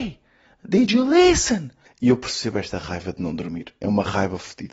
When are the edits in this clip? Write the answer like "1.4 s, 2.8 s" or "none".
1.9 s